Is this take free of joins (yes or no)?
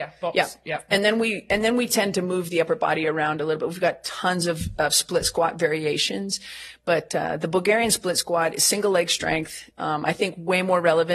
yes